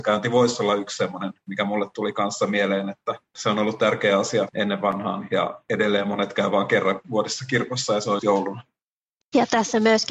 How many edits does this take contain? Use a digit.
1